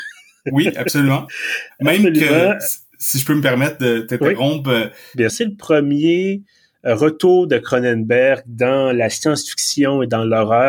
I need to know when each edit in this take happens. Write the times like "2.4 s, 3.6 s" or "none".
5.3 s